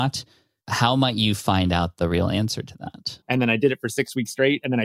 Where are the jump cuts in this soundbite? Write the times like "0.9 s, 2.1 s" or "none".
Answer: 3.2 s